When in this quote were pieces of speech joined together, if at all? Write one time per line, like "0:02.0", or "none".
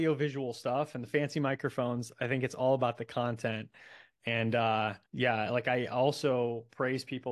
0:05.1